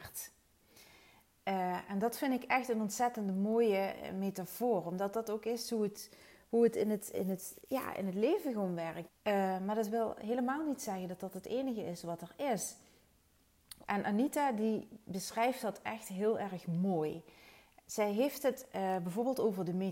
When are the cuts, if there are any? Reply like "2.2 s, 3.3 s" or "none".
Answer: 9.1 s, 13.8 s